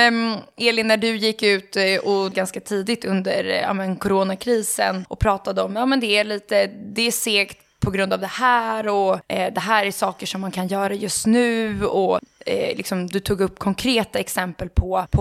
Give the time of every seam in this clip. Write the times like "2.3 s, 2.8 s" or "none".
none

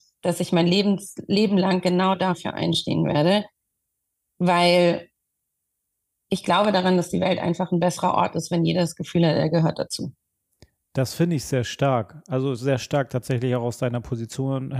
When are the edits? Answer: none

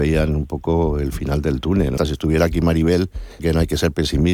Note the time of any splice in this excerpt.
2.0 s, 3.4 s

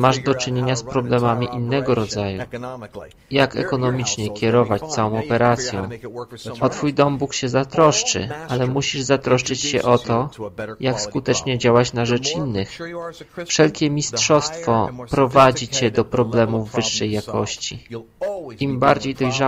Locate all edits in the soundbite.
none

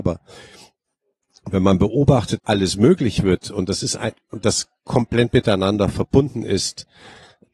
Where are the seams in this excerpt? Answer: 2.4 s

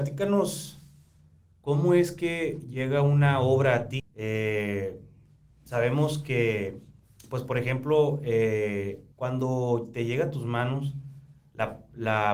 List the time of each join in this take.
4.0 s, 9.1 s

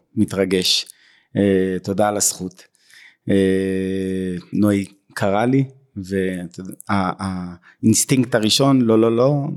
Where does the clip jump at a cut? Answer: 4.5 s

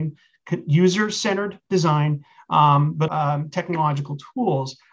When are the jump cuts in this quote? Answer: 3.1 s

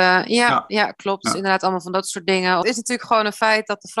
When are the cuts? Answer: 2.6 s

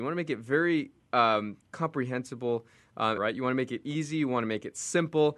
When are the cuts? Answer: 3.2 s

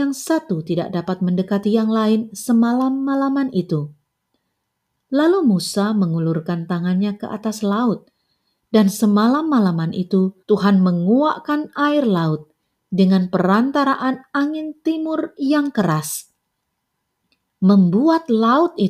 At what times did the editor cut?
10.4 s

